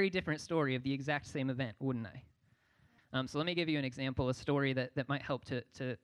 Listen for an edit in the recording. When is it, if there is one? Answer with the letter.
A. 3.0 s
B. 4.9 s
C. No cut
A